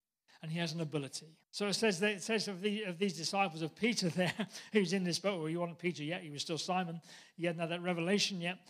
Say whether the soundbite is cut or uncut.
cut